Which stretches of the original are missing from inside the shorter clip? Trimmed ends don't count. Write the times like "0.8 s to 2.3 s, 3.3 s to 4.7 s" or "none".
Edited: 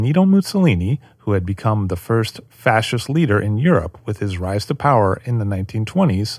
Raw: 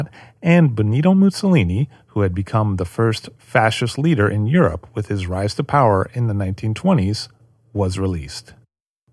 none